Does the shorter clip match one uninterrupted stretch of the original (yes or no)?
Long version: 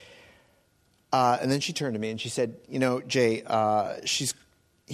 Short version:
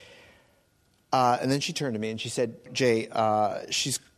no